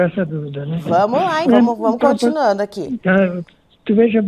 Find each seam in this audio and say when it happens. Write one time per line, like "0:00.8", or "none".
0:01.4